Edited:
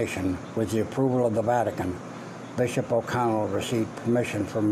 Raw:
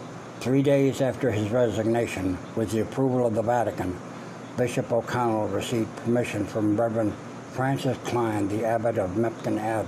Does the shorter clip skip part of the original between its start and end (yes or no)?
no